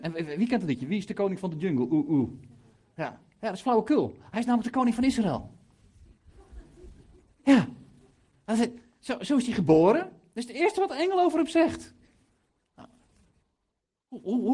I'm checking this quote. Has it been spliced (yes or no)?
no